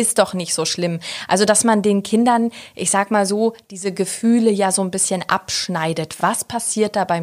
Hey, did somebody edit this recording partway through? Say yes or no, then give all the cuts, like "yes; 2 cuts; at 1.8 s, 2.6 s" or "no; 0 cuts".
no; 0 cuts